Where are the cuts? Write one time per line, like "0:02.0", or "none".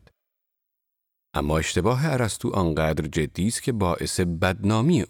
none